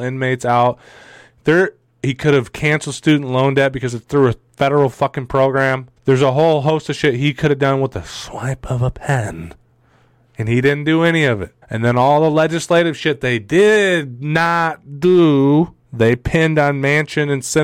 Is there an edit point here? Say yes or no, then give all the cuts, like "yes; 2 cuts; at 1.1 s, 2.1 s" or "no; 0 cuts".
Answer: yes; 3 cuts; at 6.0 s, 11.6 s, 15.8 s